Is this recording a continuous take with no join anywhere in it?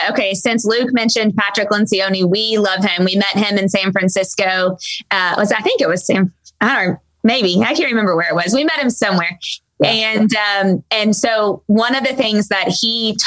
yes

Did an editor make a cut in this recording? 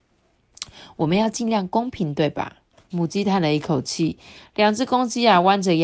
yes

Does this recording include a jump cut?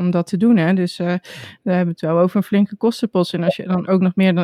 no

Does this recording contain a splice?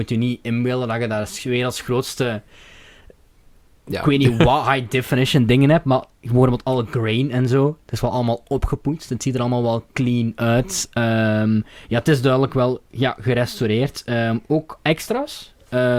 no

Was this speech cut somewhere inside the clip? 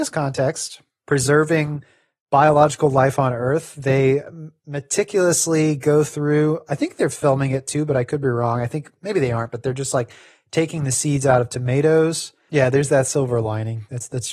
yes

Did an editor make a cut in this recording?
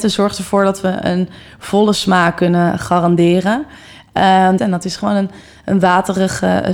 yes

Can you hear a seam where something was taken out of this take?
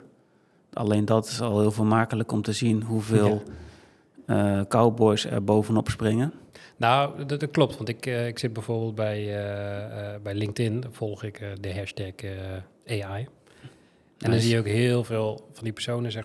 no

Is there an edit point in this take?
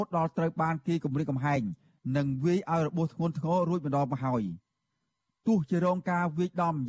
no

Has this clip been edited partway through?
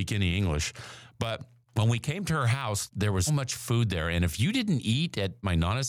yes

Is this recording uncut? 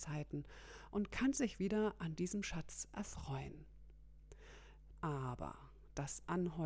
no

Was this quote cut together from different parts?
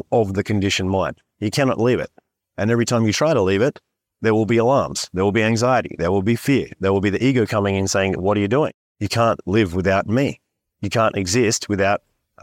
no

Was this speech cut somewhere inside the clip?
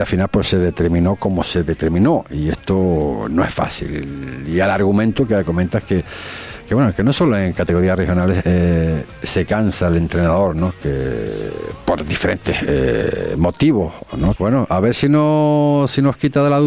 yes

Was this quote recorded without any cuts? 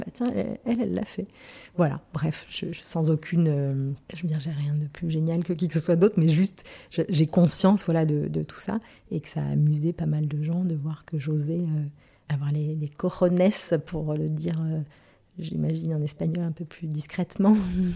yes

